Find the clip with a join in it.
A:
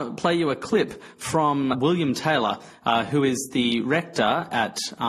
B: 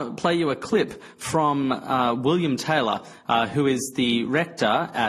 A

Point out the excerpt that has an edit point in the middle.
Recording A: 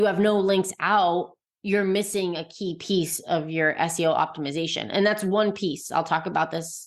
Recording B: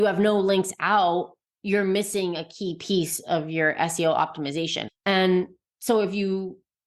B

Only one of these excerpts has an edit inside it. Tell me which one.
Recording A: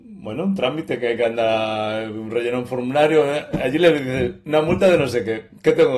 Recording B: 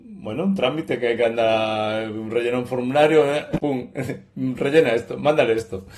B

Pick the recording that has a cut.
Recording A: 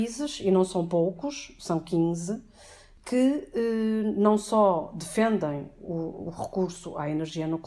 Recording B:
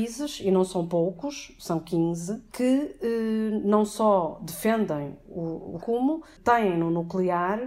B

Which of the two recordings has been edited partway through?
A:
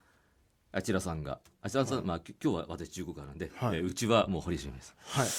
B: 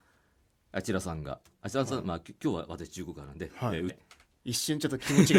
B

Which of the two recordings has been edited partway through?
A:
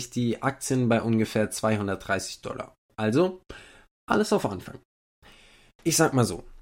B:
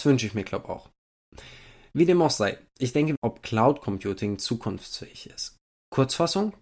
B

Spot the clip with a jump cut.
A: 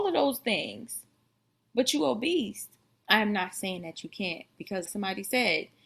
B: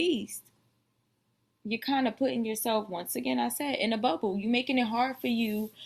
A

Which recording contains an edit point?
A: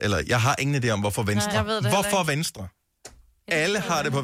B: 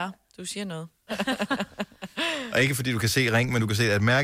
B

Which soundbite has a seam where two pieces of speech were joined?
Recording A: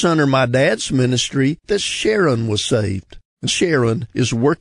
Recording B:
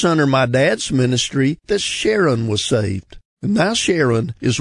A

